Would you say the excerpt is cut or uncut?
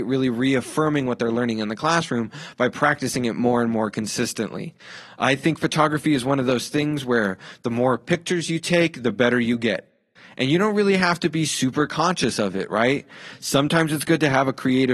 uncut